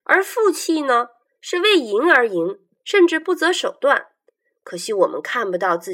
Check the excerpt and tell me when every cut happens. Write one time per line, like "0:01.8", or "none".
none